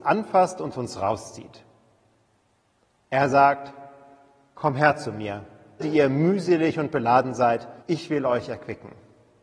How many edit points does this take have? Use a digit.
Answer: 2